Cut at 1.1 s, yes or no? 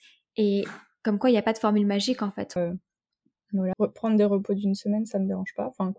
no